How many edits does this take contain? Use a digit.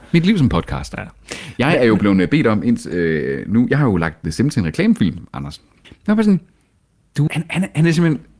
2